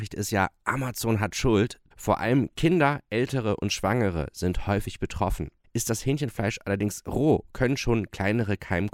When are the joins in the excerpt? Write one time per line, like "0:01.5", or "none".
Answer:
0:01.9
0:05.6

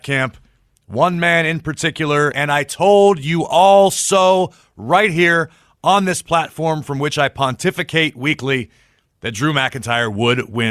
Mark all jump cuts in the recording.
0:02.3

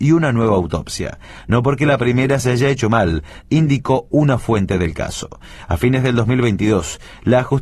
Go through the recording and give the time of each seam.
0:03.4

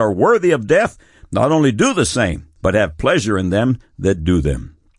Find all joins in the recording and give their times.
0:02.6

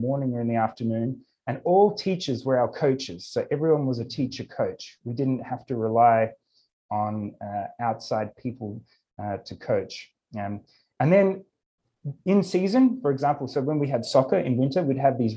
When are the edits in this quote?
none

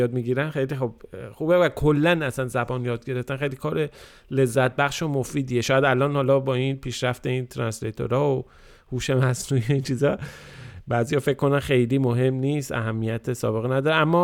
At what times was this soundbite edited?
none

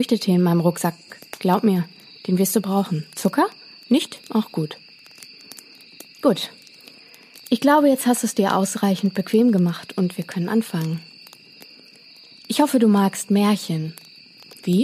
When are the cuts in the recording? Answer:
none

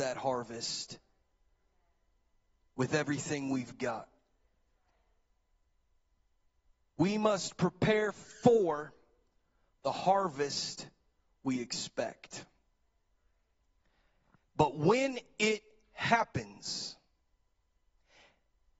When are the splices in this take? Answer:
none

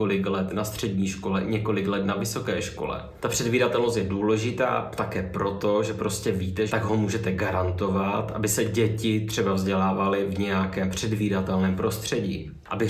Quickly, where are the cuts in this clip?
0:03.2
0:06.7

